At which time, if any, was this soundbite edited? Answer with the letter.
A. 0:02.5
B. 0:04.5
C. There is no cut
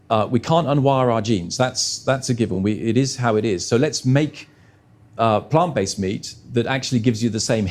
C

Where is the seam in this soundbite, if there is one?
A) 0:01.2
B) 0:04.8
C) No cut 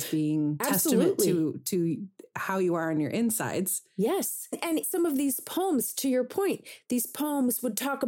B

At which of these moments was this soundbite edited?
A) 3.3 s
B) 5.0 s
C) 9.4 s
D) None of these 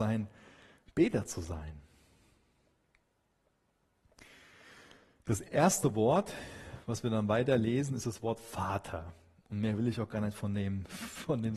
D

